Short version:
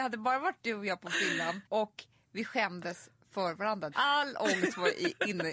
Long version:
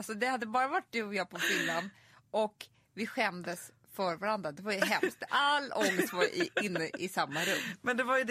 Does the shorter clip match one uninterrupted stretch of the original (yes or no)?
no